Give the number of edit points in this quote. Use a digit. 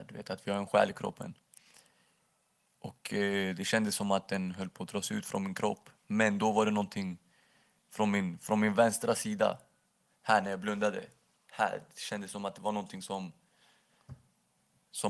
0